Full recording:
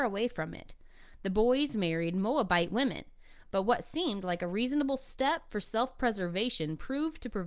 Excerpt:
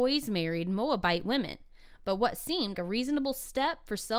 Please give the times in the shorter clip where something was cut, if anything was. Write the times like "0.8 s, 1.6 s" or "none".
2.7 s